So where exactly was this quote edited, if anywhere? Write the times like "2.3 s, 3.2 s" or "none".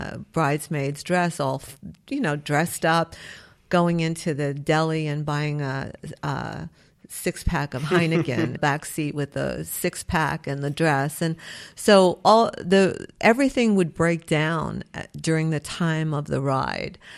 8.6 s